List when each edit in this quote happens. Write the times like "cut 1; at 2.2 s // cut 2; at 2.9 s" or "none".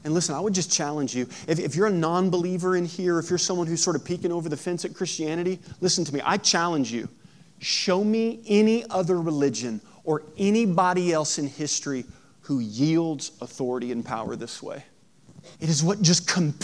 cut 1; at 15.5 s